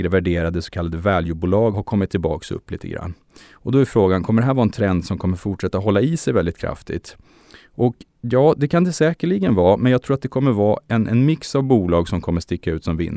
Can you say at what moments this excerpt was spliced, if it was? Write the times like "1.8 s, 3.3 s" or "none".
1.7 s

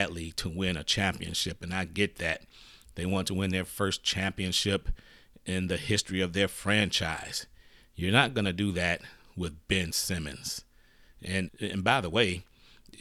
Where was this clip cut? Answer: 11.5 s

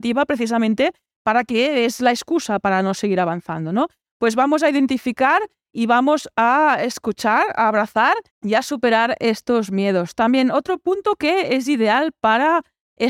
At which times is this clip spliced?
8.3 s

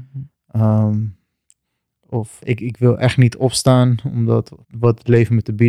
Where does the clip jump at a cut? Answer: 2.4 s, 4.6 s

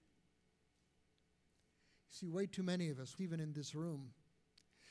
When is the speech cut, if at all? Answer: 3.2 s

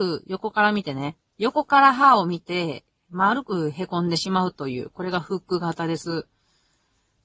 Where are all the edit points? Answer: 1.3 s

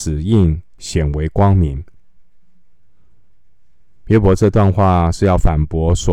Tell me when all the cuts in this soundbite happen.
none

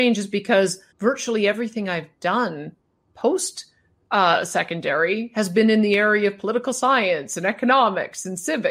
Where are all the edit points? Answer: 0.9 s

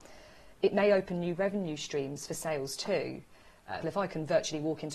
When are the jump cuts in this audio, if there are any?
3.8 s

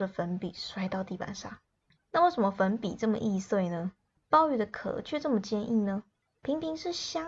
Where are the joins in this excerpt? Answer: 2.0 s

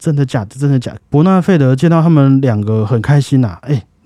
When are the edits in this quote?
1.0 s

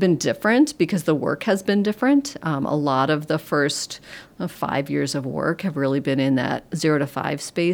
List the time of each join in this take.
none

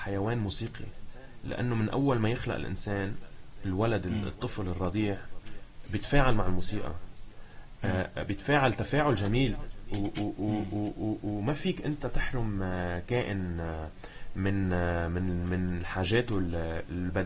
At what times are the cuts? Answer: none

